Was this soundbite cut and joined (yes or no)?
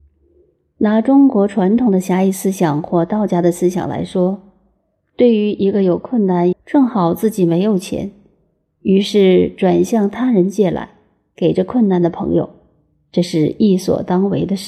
yes